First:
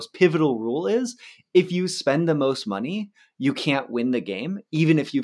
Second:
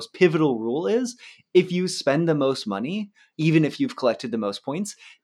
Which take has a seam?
second; 1 cut; at 3.3 s

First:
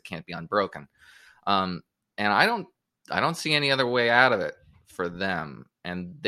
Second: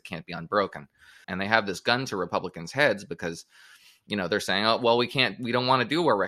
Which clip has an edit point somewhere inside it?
second; 1 cut; at 1.2 s

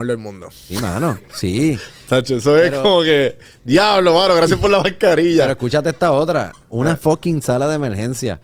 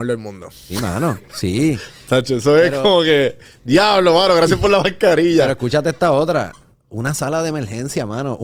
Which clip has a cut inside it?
first; 1 cut; at 6.7 s

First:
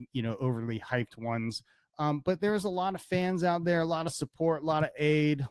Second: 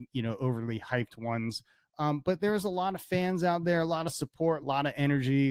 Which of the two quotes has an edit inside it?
second; 1 cut; at 4.6 s

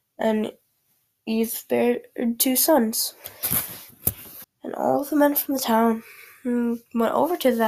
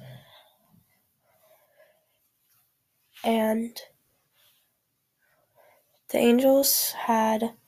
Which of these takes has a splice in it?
first; 1 cut; at 4.4 s

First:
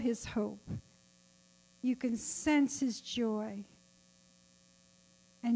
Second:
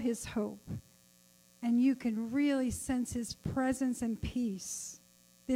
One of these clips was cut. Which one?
second; 1 cut; at 1.4 s

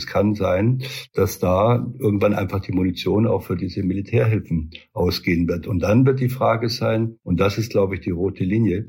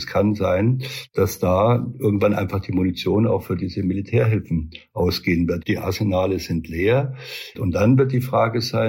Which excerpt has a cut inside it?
second; 2 cuts; at 5.6 s, 7.5 s

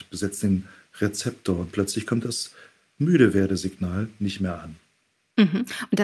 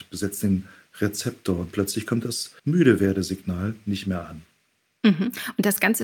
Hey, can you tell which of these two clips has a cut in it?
second; 1 cut; at 2.6 s

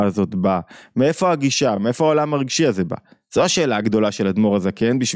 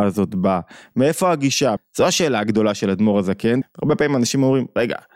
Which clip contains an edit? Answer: second; 2 cuts; at 1.8 s, 3.6 s

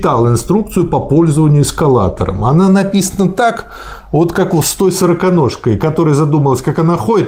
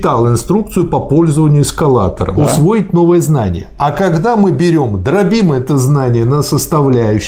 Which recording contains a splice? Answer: second; 1 cut; at 2.4 s

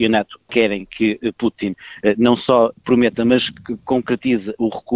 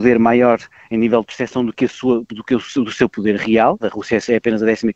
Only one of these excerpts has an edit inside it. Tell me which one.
second; 1 cut; at 3.8 s

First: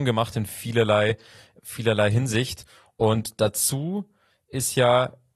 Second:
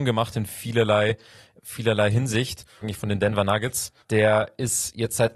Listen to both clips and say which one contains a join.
second; 2 cuts; at 2.8 s, 4.0 s

